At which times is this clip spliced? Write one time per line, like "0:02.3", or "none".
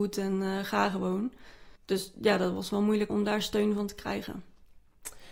0:01.8
0:03.1